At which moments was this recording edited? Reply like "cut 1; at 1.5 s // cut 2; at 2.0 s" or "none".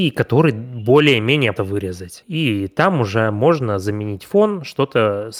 cut 1; at 1.6 s